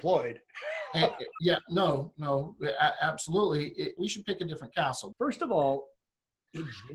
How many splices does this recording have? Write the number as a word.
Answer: two